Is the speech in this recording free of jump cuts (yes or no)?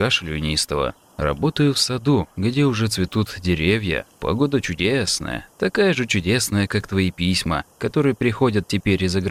yes